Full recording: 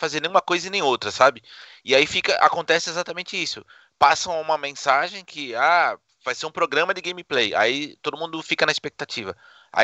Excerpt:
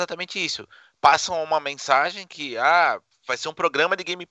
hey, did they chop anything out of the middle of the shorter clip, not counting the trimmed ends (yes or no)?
no